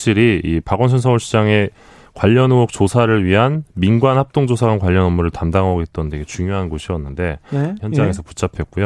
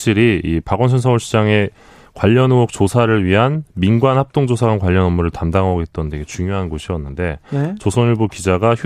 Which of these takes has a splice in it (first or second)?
first